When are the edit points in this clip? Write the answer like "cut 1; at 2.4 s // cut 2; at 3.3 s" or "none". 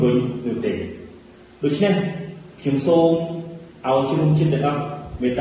none